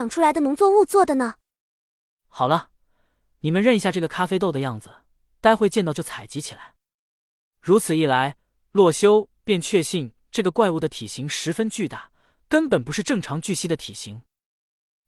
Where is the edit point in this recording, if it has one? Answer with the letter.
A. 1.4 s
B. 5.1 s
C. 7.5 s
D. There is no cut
C